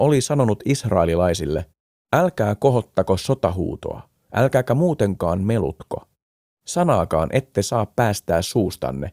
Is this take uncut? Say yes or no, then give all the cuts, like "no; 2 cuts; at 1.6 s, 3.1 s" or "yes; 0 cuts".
yes; 0 cuts